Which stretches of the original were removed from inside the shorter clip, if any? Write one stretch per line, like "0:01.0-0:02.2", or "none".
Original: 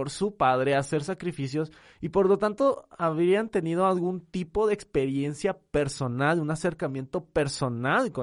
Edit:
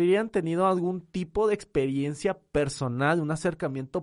none